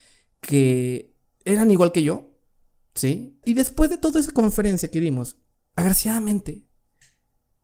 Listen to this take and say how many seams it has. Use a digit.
1